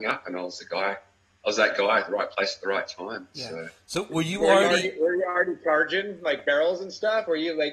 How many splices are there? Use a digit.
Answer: 0